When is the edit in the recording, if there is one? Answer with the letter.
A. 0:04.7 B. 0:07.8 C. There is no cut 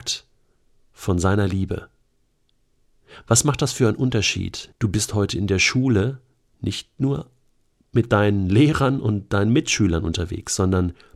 A